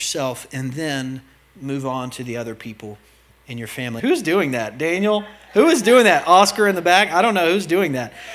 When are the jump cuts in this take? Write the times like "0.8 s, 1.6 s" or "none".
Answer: 4.0 s